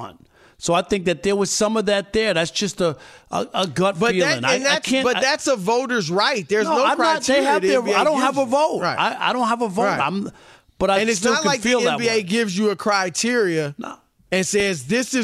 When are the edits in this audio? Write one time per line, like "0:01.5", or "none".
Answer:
none